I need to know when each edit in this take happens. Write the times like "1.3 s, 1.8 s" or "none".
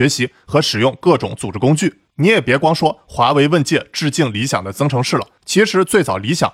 2.1 s